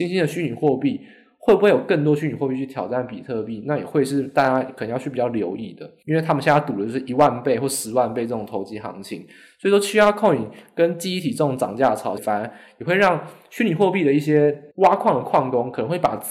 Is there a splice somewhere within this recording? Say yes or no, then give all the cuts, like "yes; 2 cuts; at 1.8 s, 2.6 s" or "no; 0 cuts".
yes; 3 cuts; at 6.0 s, 12.2 s, 14.7 s